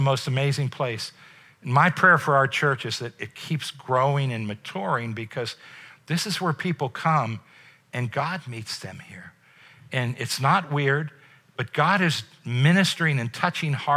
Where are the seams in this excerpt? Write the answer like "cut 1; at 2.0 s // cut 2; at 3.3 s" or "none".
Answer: none